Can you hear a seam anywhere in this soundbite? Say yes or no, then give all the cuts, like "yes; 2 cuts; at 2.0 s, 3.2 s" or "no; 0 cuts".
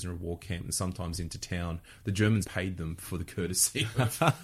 yes; 1 cut; at 2.4 s